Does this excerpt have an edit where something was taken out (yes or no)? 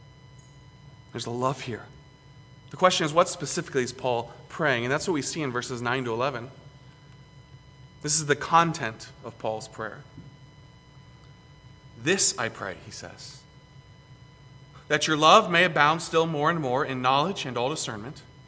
yes